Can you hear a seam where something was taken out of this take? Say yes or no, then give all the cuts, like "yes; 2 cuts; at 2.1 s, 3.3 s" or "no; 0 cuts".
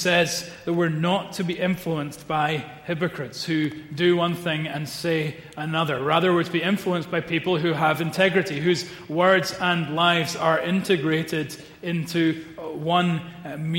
no; 0 cuts